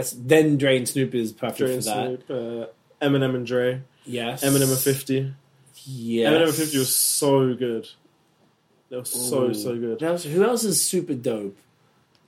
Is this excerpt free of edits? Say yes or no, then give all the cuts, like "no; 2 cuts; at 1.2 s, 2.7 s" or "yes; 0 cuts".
no; 1 cut; at 10.0 s